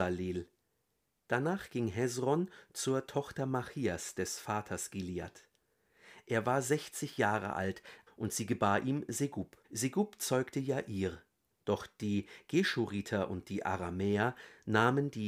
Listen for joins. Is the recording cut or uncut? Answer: cut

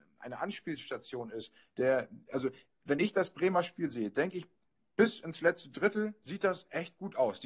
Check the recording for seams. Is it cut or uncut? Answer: uncut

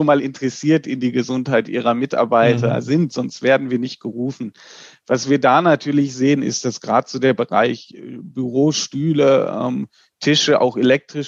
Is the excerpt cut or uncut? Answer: uncut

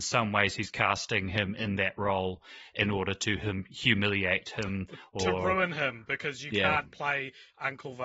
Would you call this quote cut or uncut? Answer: uncut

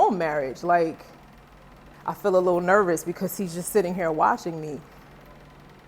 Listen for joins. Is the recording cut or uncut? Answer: cut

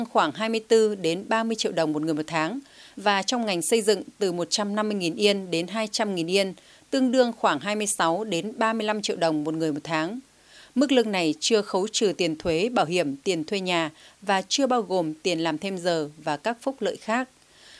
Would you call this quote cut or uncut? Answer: uncut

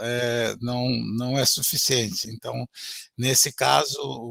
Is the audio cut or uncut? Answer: cut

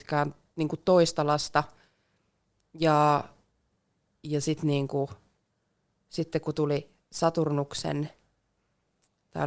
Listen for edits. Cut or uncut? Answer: uncut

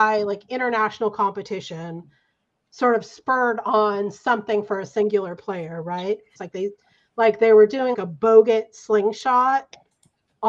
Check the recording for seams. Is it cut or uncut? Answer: cut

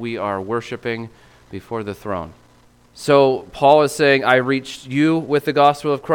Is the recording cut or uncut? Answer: cut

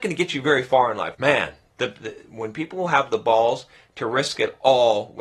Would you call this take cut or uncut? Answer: cut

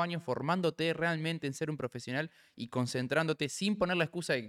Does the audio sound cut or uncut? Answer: uncut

